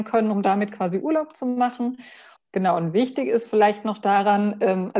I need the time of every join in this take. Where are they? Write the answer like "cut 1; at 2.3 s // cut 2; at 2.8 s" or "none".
cut 1; at 2.4 s